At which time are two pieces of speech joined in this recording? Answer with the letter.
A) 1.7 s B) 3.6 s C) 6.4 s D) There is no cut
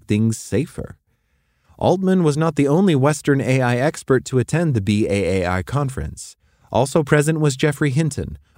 D